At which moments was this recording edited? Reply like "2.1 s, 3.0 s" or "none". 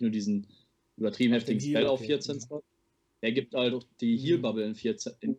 none